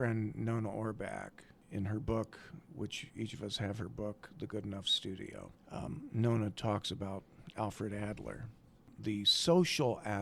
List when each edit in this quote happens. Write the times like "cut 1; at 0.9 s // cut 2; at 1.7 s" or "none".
none